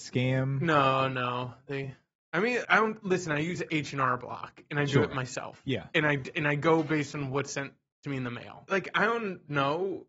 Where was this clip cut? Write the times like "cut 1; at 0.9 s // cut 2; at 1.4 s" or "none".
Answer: cut 1; at 2.6 s // cut 2; at 8.7 s

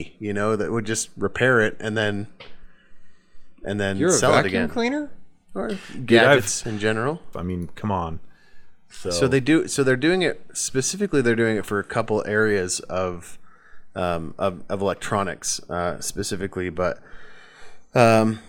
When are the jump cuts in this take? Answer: cut 1; at 7.3 s

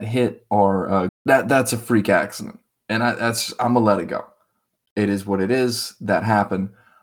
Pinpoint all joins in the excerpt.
cut 1; at 1.1 s

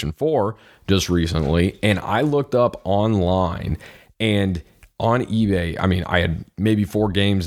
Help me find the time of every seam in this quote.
none

